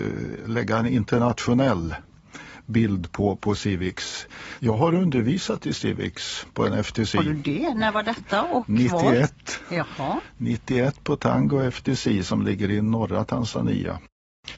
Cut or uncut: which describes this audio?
cut